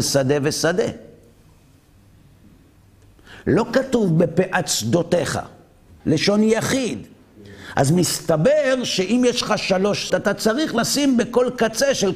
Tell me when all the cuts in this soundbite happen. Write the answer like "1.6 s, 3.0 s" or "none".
6.0 s, 10.1 s